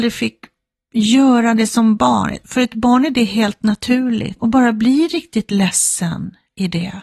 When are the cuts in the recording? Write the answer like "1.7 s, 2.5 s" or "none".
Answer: 4.4 s